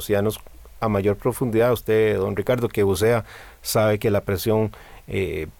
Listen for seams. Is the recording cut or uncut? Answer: uncut